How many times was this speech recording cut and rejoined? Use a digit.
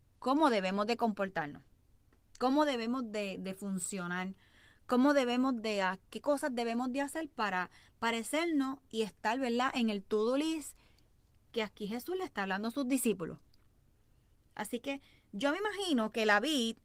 0